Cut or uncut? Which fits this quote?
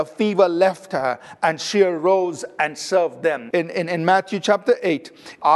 cut